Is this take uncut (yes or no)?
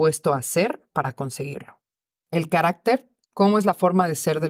yes